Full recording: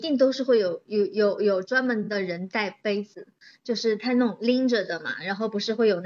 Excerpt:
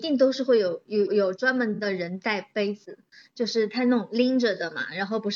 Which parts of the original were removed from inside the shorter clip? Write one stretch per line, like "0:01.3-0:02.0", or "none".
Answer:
0:01.1-0:01.4